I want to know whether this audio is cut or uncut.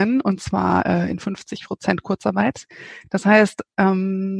uncut